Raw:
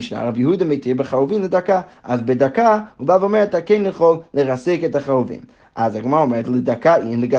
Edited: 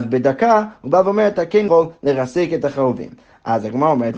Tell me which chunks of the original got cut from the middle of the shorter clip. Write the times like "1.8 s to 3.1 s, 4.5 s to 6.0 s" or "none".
3.8 s to 4.0 s